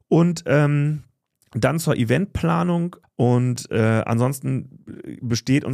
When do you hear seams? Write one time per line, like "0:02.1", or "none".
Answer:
0:03.0